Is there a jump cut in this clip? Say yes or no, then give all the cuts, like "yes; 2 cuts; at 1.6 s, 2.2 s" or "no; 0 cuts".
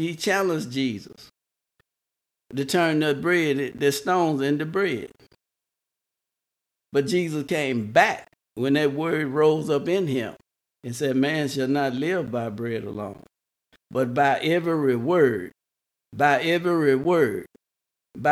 no; 0 cuts